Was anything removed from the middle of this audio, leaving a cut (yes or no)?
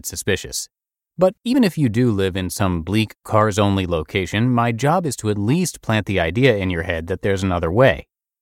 no